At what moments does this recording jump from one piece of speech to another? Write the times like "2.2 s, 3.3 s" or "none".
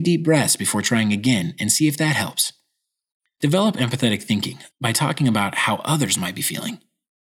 none